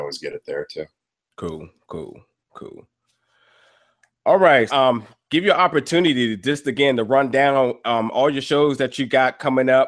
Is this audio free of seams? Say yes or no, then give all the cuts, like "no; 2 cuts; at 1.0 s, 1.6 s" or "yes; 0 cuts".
no; 1 cut; at 4.7 s